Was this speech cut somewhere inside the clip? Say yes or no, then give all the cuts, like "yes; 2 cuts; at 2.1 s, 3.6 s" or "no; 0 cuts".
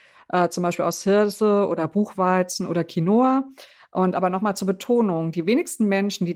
no; 0 cuts